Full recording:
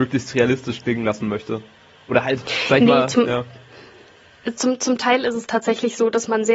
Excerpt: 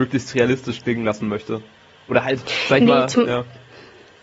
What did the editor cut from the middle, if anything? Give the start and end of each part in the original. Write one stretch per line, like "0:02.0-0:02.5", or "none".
none